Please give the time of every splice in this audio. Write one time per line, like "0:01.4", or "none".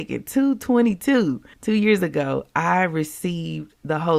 0:01.5